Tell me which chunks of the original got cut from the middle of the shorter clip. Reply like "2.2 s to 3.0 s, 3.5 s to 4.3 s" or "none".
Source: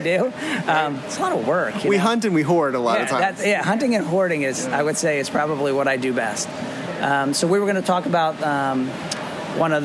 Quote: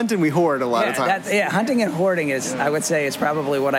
none